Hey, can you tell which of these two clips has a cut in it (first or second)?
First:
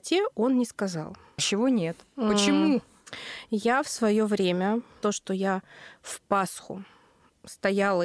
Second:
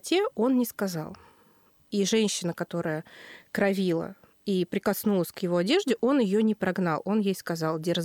first